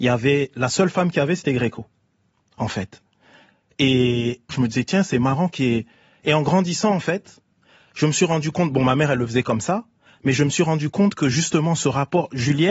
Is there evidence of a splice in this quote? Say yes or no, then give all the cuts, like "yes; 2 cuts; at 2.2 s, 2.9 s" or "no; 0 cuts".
yes; 1 cut; at 4.5 s